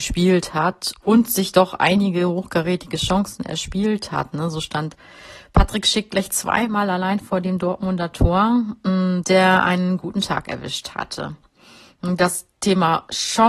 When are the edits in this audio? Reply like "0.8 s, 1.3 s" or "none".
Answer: 9.2 s